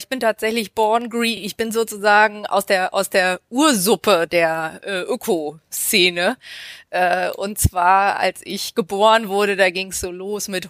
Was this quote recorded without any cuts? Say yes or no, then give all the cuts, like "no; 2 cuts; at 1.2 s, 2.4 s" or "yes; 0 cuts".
yes; 0 cuts